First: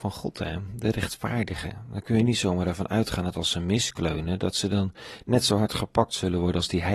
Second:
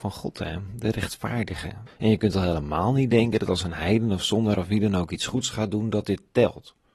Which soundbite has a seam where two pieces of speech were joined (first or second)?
second